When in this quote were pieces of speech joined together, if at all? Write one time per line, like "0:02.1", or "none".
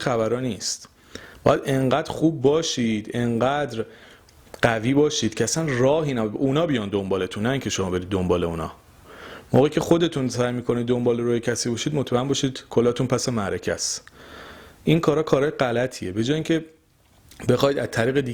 none